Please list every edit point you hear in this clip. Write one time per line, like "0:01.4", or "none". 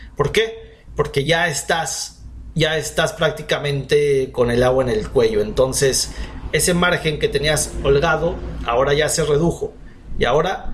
none